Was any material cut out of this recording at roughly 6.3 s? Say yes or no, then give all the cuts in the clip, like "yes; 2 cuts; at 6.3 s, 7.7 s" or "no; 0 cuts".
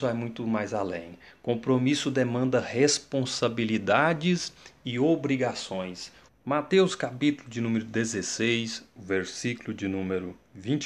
yes; 1 cut; at 6.3 s